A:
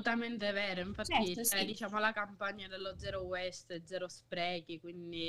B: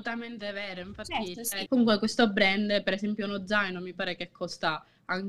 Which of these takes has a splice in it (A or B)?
B